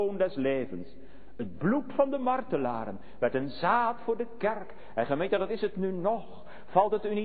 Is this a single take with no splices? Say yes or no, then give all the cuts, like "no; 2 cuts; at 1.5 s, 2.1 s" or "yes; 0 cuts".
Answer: yes; 0 cuts